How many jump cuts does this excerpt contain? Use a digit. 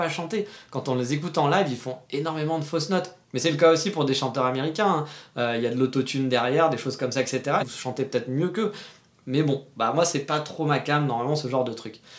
1